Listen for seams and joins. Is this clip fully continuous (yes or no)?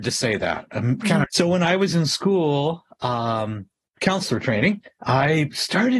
no